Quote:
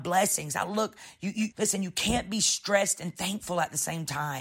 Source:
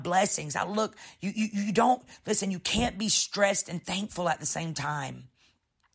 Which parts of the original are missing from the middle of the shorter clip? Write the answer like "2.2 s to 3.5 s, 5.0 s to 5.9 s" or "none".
1.5 s to 2.2 s